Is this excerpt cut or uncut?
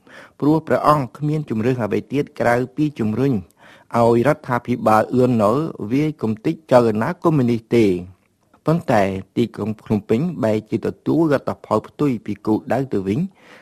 uncut